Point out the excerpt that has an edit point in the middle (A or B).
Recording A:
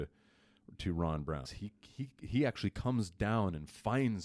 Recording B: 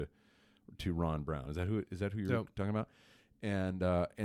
A